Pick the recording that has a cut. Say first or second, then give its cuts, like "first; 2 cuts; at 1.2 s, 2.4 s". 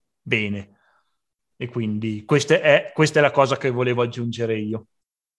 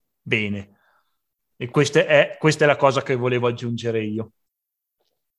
second; 1 cut; at 1.7 s